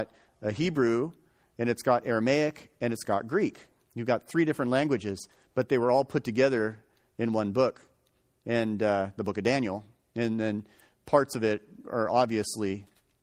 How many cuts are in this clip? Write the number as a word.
zero